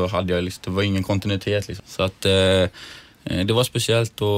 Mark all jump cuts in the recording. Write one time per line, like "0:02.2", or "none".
0:01.8